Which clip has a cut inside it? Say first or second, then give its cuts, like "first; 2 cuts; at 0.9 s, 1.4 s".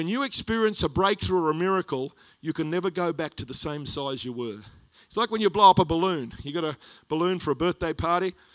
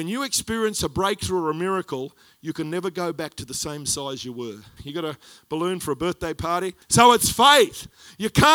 second; 2 cuts; at 4.8 s, 6.8 s